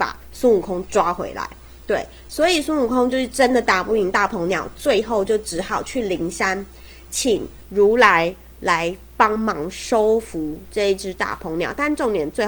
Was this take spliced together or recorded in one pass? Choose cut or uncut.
uncut